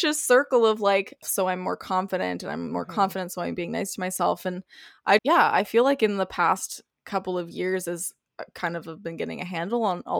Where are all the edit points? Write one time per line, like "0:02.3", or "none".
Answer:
0:01.2
0:05.2